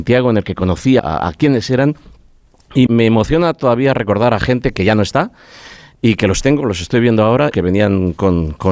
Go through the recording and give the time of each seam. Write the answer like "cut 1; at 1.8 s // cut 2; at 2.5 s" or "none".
cut 1; at 1.0 s // cut 2; at 2.9 s // cut 3; at 7.5 s